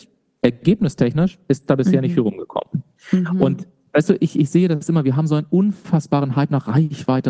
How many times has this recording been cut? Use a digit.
0